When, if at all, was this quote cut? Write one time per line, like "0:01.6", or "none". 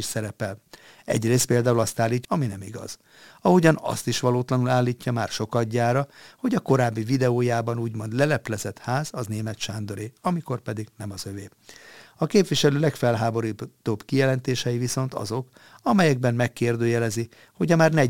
0:02.2